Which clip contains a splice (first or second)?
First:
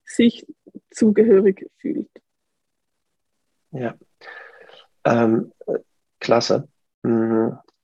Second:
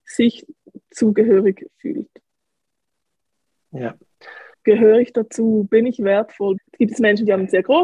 second